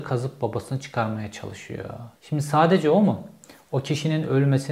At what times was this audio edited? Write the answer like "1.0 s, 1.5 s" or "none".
2.2 s